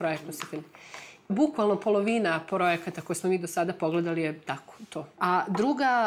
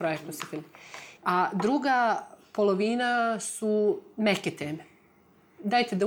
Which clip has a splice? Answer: second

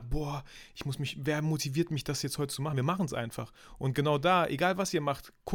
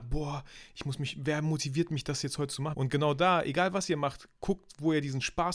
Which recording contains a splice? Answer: second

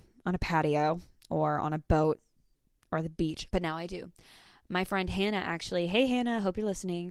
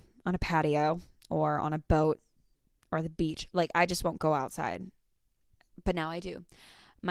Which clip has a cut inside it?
first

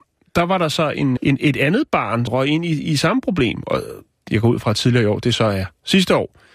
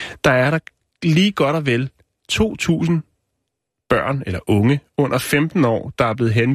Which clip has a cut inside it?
first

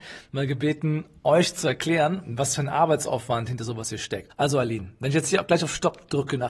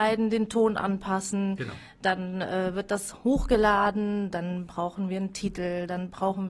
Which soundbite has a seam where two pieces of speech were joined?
first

